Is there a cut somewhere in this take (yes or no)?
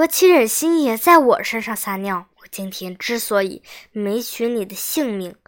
yes